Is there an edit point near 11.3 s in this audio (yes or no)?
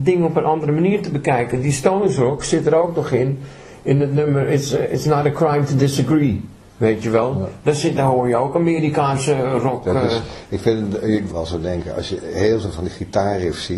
yes